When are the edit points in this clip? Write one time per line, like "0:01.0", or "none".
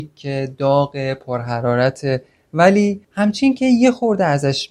0:03.0